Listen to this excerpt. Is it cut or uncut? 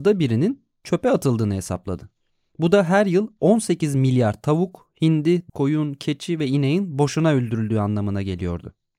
cut